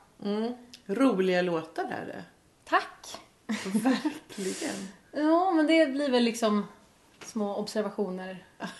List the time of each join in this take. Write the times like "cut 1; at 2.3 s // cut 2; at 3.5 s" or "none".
none

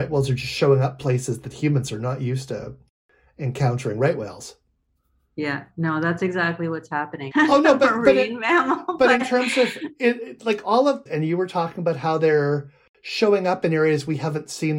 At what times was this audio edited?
cut 1; at 7.3 s // cut 2; at 11.1 s

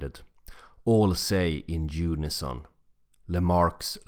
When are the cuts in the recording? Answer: none

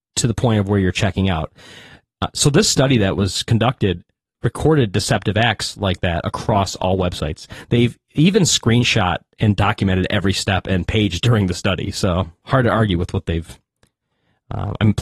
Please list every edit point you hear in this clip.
none

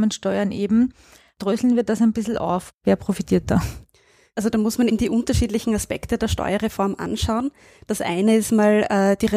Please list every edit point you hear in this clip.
cut 1; at 4.9 s

